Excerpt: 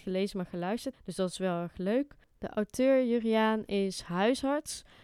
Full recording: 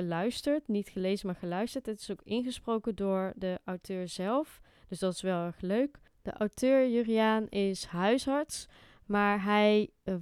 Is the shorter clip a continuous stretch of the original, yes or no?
no